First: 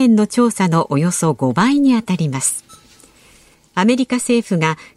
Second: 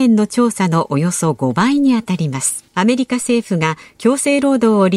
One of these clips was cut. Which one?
second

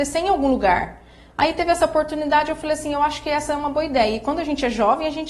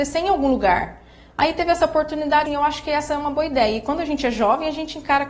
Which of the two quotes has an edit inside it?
second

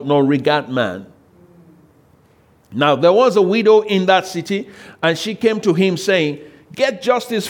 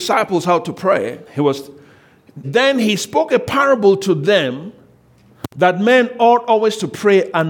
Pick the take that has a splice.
second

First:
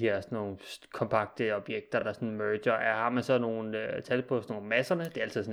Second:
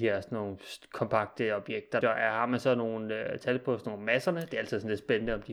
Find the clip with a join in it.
second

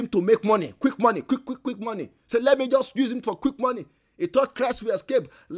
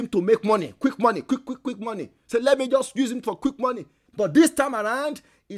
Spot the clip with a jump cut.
second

